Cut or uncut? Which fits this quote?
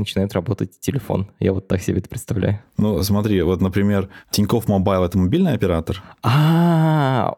uncut